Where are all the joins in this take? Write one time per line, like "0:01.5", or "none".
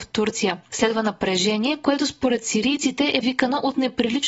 0:03.2